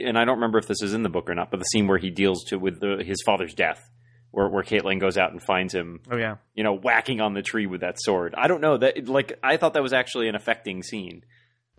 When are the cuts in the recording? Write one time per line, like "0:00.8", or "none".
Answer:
0:02.8